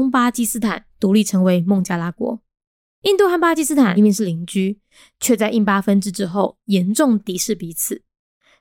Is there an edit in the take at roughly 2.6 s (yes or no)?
no